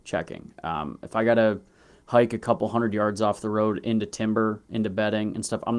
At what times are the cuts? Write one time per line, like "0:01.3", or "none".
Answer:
none